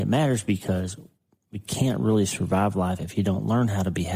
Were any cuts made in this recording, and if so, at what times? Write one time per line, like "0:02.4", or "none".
none